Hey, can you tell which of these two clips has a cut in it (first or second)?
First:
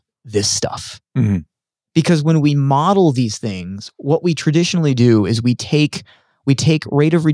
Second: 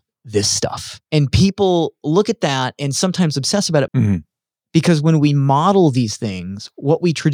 second